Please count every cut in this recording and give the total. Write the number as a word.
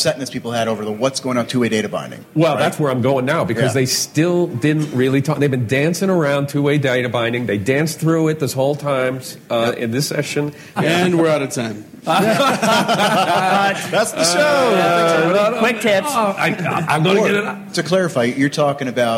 one